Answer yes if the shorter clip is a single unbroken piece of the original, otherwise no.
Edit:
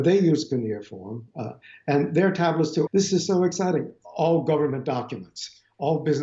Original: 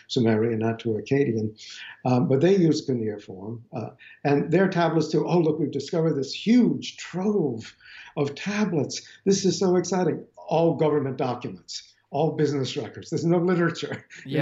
no